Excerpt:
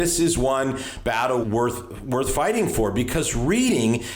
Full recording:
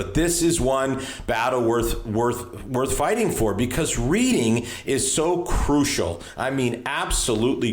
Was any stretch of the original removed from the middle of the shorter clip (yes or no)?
yes